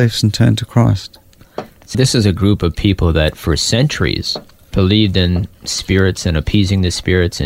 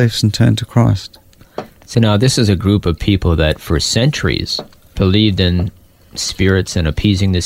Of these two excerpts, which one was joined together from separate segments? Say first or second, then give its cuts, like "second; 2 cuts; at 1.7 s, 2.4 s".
first; 2 cuts; at 1.9 s, 5.5 s